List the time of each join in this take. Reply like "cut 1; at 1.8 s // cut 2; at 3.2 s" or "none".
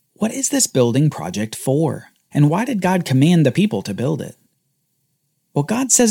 cut 1; at 2.3 s